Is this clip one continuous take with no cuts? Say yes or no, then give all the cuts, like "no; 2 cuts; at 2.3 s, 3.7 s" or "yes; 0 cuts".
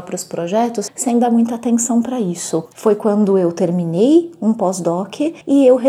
no; 1 cut; at 2.7 s